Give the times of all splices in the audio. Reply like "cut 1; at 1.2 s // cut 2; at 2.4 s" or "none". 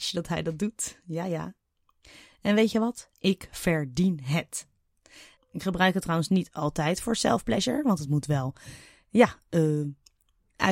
cut 1; at 5.4 s